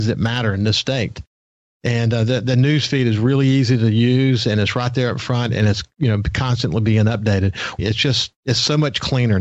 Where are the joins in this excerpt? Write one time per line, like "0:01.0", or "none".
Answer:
0:07.8